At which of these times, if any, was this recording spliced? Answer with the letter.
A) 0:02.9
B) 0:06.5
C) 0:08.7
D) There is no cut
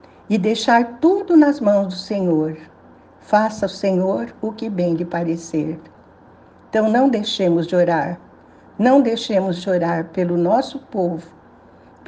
D